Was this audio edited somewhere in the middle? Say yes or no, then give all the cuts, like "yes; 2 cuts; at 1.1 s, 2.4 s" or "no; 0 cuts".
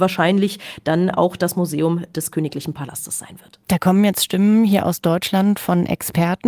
yes; 1 cut; at 3.6 s